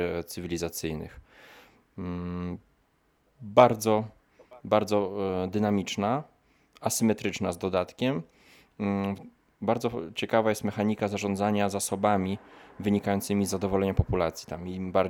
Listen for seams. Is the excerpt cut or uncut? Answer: uncut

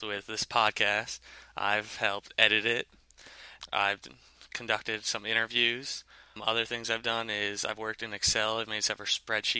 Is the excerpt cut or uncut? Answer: uncut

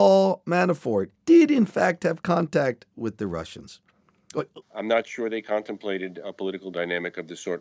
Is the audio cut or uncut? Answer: cut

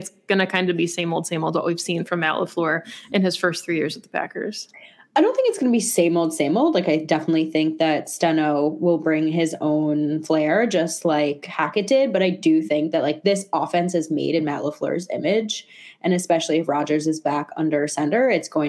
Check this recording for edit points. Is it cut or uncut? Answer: uncut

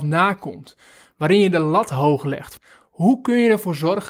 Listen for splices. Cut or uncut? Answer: uncut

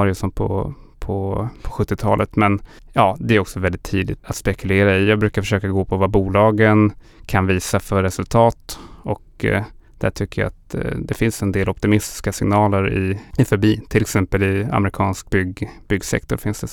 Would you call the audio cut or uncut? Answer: cut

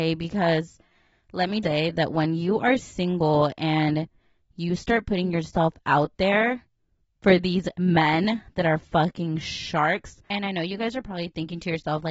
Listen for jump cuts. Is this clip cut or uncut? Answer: cut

